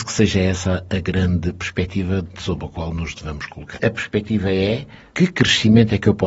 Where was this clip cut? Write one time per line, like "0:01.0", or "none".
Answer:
0:03.7

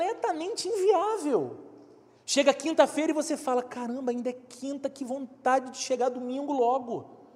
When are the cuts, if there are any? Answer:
0:02.1

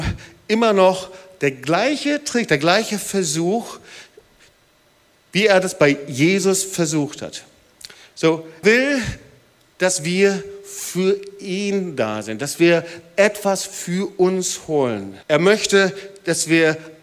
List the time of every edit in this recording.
0:08.6
0:15.2

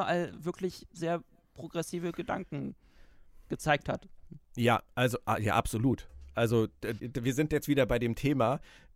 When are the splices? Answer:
0:07.0

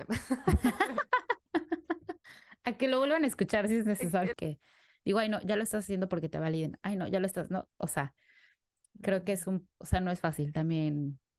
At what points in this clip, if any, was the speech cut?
0:04.3
0:09.8

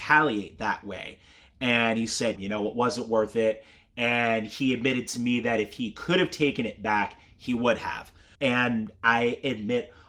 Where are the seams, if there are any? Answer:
0:02.4
0:08.3

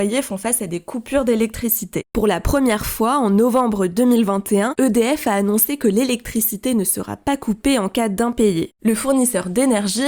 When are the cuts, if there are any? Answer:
none

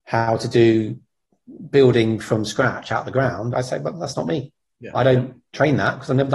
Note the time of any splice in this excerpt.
0:03.5

